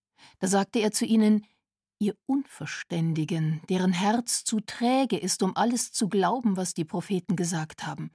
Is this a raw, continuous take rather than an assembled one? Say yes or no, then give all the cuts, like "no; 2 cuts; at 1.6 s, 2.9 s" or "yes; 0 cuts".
yes; 0 cuts